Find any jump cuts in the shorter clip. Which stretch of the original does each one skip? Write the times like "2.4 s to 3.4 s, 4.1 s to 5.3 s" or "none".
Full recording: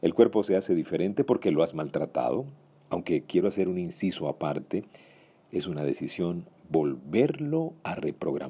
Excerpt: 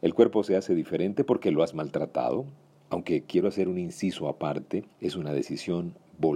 4.9 s to 5.4 s